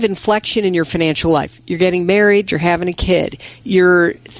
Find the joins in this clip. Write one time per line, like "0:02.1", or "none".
0:02.5